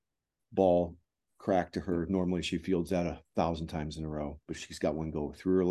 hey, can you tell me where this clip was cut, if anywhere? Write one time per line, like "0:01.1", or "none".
none